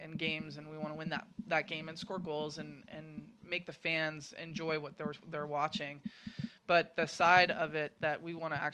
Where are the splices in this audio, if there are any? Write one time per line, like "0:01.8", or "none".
none